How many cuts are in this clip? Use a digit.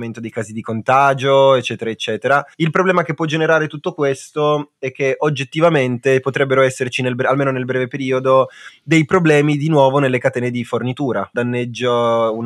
2